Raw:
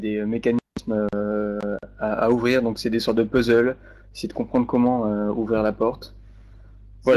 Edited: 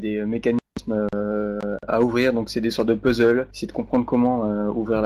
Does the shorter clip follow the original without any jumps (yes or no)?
no